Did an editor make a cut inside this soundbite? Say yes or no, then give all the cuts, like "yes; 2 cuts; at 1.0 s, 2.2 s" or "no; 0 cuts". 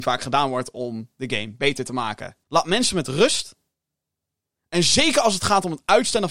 yes; 1 cut; at 2.4 s